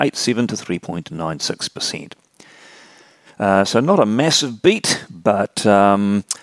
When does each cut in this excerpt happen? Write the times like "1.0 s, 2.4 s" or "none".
3.3 s